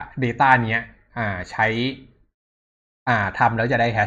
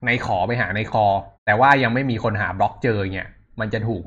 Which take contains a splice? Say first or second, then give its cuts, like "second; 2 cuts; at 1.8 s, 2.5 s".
second; 1 cut; at 1.3 s